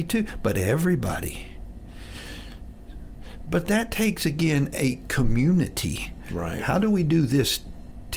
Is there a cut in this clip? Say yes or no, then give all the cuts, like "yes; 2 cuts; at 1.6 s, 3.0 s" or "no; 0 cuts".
no; 0 cuts